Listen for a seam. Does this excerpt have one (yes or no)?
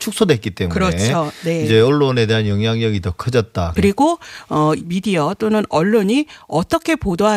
yes